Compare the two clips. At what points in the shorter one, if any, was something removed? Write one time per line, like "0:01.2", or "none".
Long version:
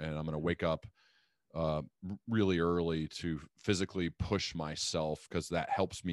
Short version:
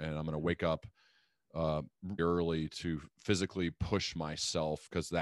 0:02.2